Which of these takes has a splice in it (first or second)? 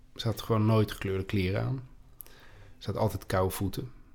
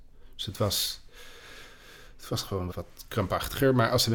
second